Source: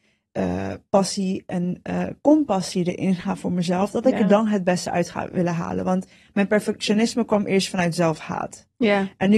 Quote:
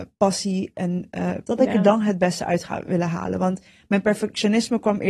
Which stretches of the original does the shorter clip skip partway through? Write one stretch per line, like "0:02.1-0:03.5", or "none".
0:02.2-0:03.9